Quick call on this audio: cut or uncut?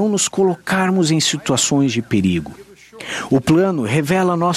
cut